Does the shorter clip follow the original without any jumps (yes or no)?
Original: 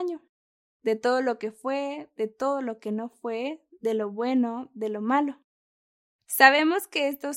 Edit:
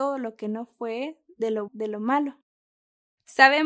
no